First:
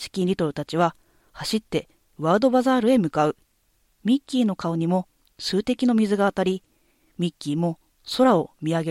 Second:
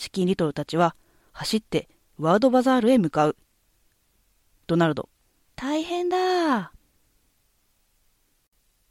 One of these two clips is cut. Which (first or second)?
first